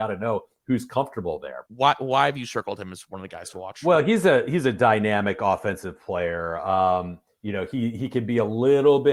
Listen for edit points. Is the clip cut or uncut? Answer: cut